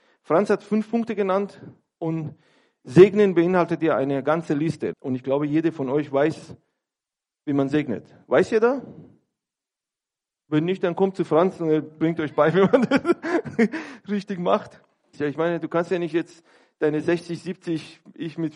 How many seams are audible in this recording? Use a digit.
2